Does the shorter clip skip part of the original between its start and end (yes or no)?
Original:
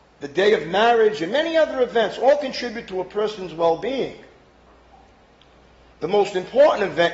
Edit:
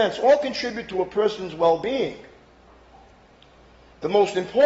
no